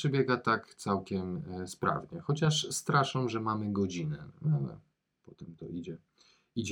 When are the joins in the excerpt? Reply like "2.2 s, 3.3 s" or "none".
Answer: none